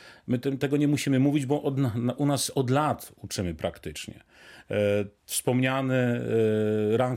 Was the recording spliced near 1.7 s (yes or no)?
no